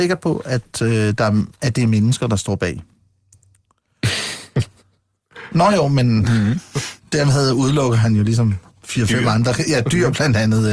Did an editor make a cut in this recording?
no; 0 cuts

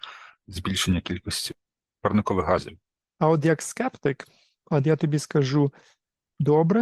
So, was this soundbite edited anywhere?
no; 0 cuts

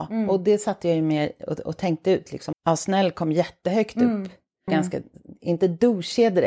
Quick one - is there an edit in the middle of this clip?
yes; 2 cuts; at 2.5 s, 4.7 s

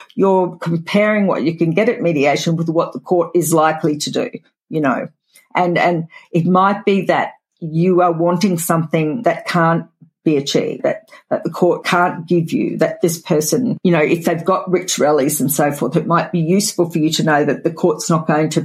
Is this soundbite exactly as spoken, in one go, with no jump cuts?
yes; 0 cuts

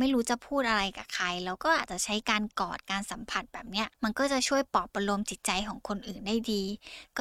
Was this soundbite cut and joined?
yes; 1 cut; at 3.9 s

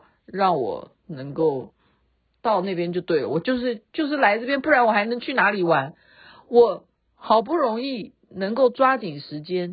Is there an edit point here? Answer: no; 0 cuts

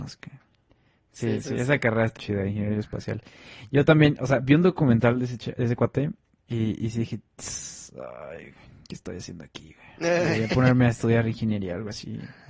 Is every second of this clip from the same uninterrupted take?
no; 1 cut; at 2.2 s

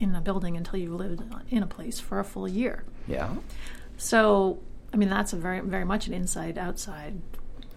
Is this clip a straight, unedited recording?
yes; 0 cuts

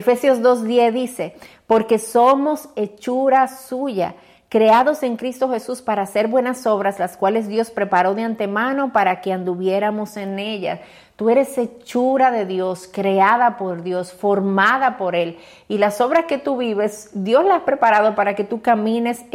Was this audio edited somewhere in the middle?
no; 0 cuts

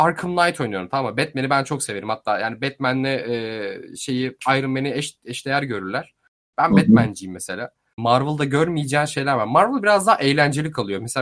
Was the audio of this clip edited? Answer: yes; 1 cut; at 8.0 s

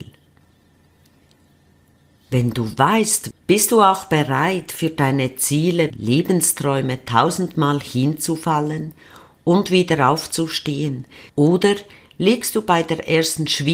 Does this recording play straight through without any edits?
no; 3 cuts; at 3.3 s, 5.9 s, 11.3 s

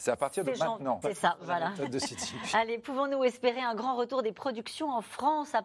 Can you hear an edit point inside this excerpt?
yes; 1 cut; at 1.0 s

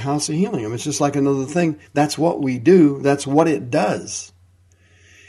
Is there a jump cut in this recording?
no; 0 cuts

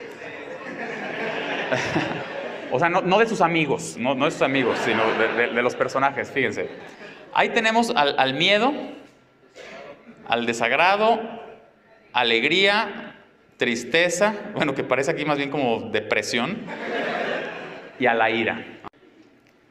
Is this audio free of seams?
yes; 0 cuts

